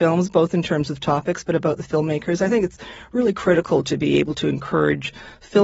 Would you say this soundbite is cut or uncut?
uncut